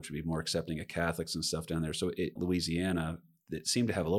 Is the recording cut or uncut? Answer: cut